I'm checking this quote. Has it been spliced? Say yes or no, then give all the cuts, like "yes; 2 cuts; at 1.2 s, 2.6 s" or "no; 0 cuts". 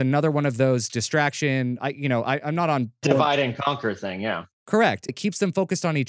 yes; 1 cut; at 5.1 s